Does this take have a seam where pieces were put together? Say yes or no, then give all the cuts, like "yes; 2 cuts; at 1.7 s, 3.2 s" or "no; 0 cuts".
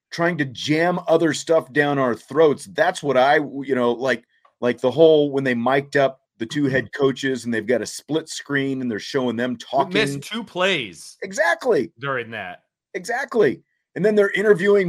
no; 0 cuts